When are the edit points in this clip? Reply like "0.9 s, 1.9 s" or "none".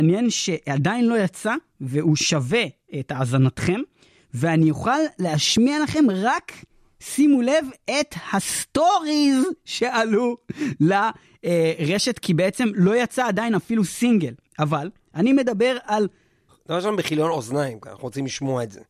16.5 s